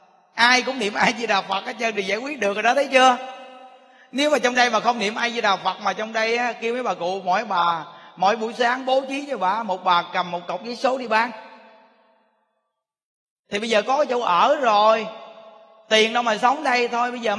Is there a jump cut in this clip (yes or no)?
no